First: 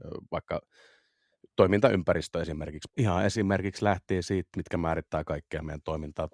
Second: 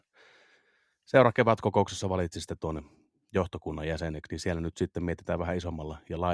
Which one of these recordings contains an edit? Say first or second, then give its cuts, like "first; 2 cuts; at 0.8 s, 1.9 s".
first; 2 cuts; at 2.9 s, 4.5 s